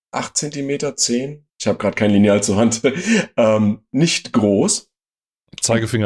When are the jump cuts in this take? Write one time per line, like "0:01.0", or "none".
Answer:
0:01.5